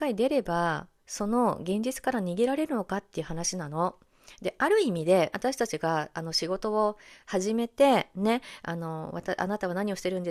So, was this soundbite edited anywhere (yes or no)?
yes